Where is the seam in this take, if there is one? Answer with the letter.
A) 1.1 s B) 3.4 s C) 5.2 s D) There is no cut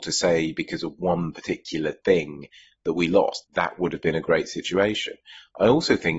B